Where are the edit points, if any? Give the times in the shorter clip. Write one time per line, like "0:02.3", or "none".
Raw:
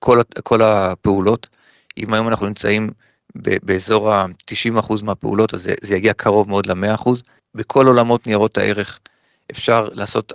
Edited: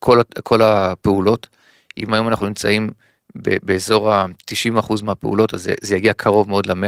none